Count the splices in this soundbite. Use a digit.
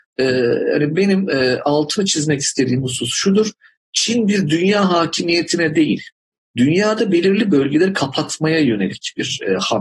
0